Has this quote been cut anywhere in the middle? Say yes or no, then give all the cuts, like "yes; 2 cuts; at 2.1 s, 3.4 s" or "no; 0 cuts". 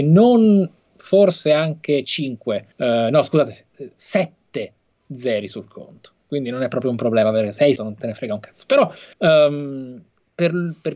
yes; 3 cuts; at 2.7 s, 7.8 s, 9.1 s